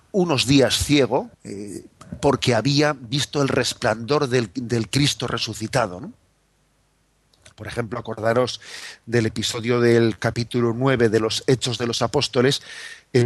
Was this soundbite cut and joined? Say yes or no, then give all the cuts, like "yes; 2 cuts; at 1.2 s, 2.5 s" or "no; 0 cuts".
yes; 2 cuts; at 1.3 s, 7.5 s